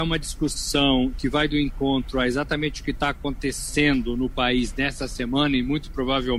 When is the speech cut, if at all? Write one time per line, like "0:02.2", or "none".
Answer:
none